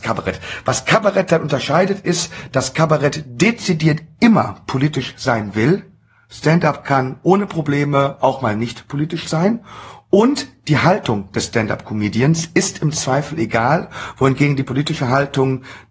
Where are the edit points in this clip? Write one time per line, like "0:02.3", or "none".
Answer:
none

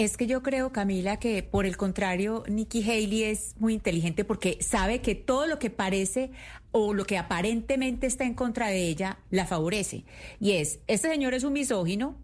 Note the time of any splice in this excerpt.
none

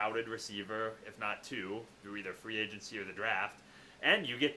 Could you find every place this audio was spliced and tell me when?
none

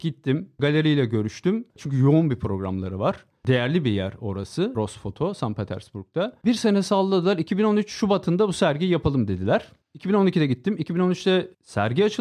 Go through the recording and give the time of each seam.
0:01.7

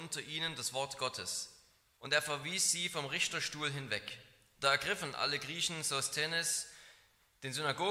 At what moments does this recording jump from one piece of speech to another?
0:02.0

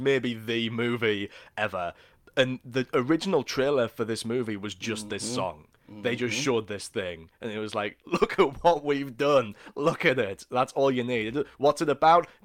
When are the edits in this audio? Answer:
none

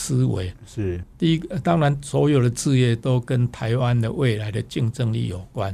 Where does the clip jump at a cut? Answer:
0:01.0

